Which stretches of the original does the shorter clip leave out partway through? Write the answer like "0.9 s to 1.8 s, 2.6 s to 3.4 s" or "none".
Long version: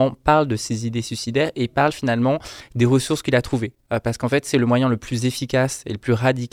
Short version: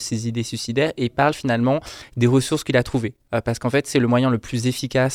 none